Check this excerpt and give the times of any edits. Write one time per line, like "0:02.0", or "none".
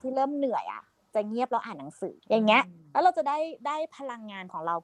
0:02.2